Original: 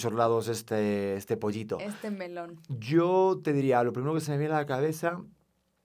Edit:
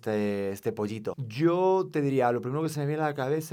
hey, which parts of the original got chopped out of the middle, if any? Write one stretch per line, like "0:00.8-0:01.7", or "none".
0:01.8-0:02.6